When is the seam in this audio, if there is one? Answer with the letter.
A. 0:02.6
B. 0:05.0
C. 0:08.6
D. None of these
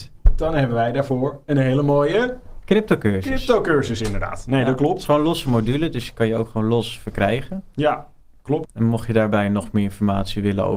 C